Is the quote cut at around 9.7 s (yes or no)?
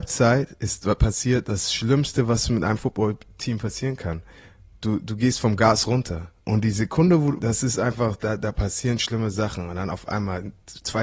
no